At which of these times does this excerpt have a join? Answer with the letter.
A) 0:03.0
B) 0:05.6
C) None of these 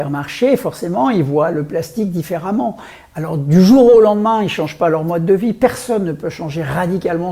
C